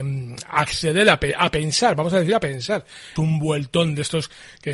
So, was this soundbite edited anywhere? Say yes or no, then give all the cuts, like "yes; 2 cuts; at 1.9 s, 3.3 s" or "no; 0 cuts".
yes; 1 cut; at 3.2 s